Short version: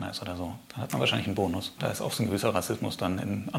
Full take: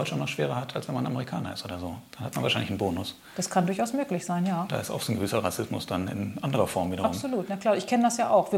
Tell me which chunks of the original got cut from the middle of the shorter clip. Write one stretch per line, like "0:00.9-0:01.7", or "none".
0:03.2-0:04.7

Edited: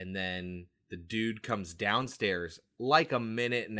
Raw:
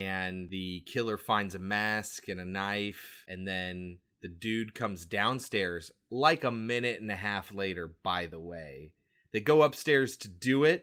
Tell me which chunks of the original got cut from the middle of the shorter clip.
none

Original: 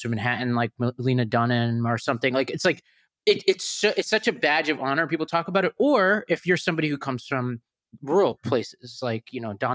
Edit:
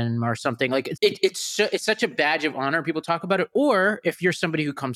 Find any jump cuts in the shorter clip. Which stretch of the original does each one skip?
0:02.6-0:03.2

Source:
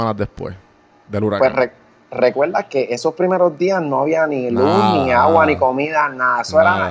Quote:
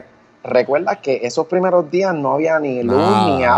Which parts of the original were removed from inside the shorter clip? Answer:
none

